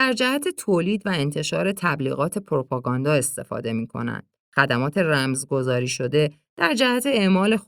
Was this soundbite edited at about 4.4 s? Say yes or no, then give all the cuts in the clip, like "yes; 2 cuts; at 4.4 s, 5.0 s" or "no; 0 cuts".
yes; 1 cut; at 4.4 s